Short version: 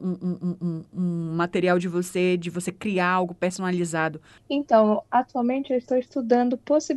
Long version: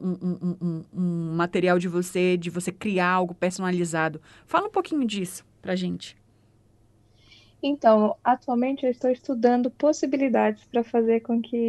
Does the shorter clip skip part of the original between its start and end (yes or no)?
yes